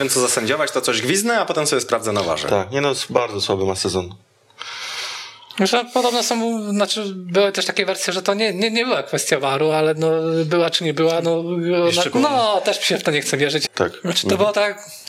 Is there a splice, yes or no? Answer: yes